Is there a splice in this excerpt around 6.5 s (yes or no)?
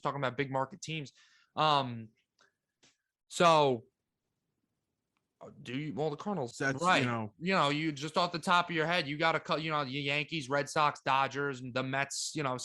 yes